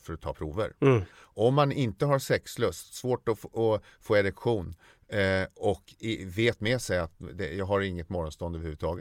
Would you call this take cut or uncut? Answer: cut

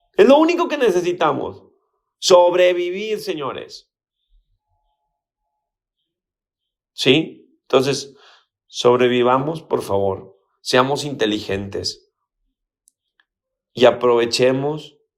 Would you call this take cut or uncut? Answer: uncut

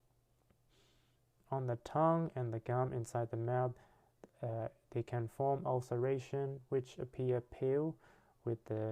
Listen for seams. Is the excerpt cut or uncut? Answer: uncut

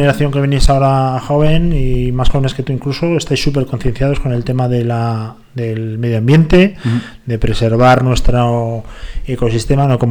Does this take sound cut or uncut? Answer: uncut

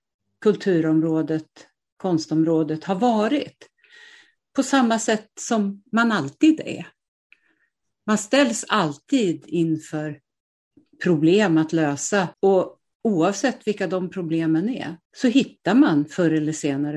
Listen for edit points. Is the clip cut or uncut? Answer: cut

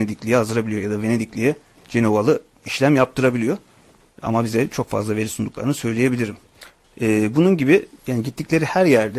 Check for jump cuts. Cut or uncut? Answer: cut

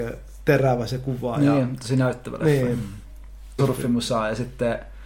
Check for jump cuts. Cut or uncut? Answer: cut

